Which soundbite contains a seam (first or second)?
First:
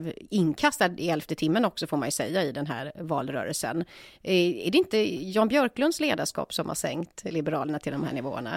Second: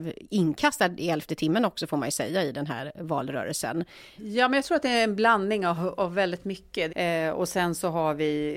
second